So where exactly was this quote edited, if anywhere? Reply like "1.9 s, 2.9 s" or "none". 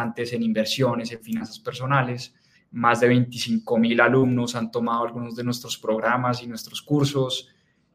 2.5 s